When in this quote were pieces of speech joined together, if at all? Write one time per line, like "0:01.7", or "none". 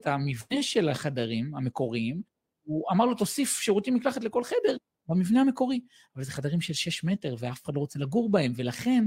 none